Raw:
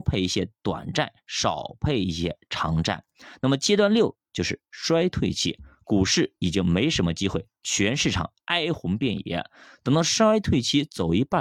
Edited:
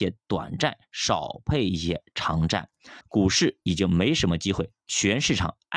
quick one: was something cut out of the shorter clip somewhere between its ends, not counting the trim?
yes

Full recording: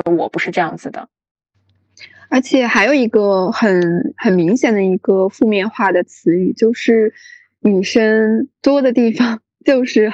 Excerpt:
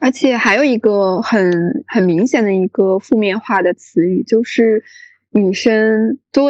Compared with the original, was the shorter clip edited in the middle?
no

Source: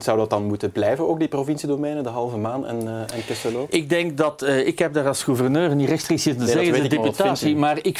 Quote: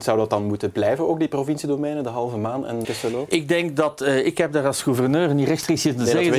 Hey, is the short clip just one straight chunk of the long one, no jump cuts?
no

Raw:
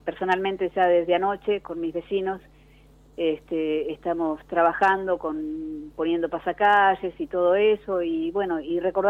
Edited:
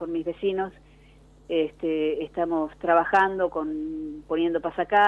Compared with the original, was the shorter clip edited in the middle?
no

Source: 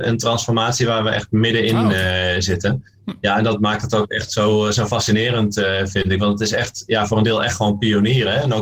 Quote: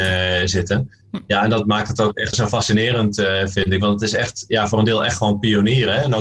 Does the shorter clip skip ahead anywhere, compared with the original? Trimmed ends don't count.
yes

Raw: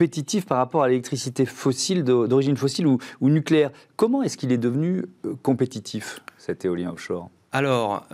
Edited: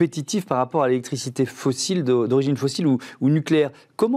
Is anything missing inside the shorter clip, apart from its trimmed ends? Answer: no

